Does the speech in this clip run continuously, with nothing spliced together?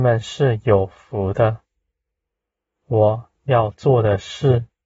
yes; 0 cuts

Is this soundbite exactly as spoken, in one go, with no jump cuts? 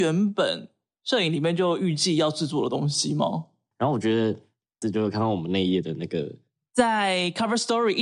no; 2 cuts; at 3.7 s, 4.8 s

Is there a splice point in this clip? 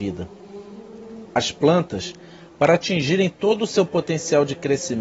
no; 0 cuts

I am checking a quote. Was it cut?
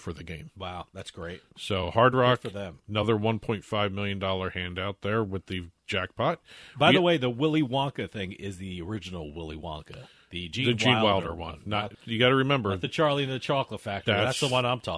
yes; 1 cut; at 11.9 s

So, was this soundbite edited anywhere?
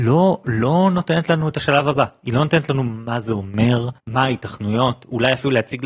yes; 1 cut; at 4.0 s

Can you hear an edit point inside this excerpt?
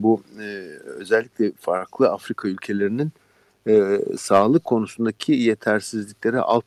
no; 0 cuts

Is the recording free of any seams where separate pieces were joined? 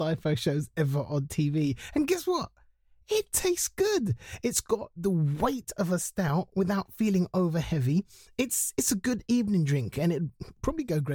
yes; 0 cuts

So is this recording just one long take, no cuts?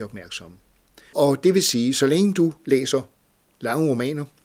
no; 1 cut; at 1.1 s

